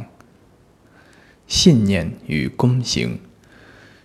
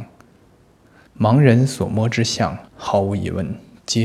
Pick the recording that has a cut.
second; 2 cuts; at 1.1 s, 2.7 s

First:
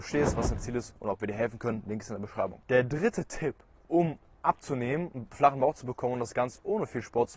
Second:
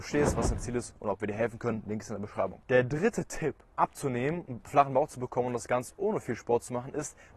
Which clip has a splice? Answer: second; 1 cut; at 3.7 s

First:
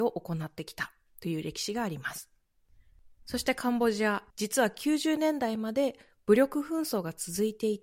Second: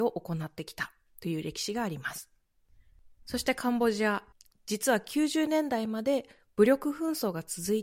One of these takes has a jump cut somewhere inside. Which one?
first; 1 cut; at 4.3 s

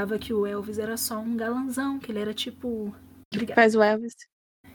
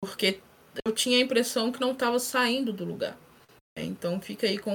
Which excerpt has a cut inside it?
first; 1 cut; at 3.3 s

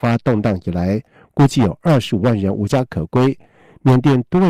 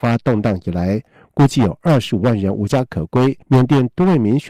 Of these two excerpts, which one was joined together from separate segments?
second; 1 cut; at 3.4 s

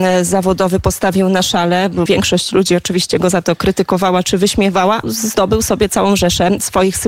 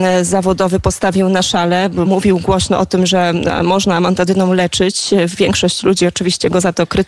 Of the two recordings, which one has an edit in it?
first; 2 cuts; at 2.1 s, 5.0 s

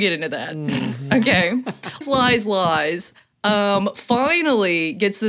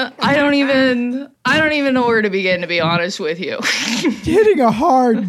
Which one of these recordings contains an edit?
first; 1 cut; at 2.0 s

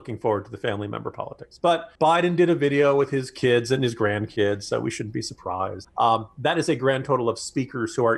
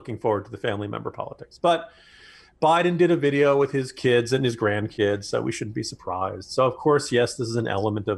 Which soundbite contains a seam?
first; 2 cuts; at 2.0 s, 5.8 s

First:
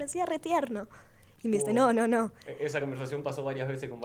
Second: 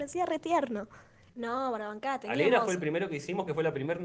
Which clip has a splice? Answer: second; 1 cut; at 1.3 s

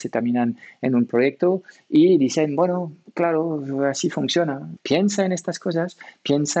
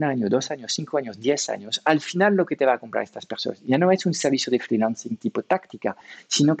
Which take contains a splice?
first; 1 cut; at 4.8 s

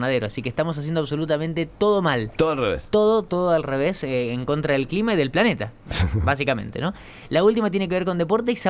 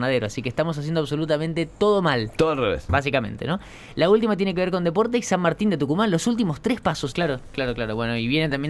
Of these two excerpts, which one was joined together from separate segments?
second; 2 cuts; at 2.9 s, 7.1 s

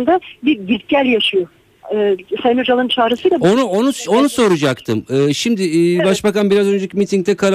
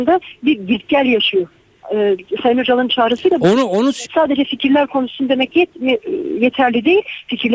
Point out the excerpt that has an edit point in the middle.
second; 1 cut; at 4.1 s

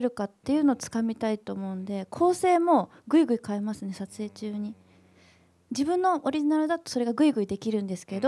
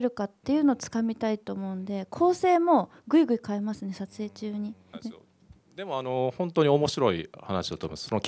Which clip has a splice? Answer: second; 1 cut; at 4.9 s

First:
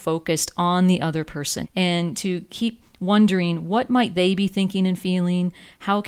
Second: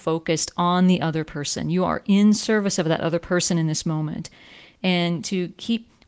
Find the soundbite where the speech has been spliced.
first; 1 cut; at 1.6 s

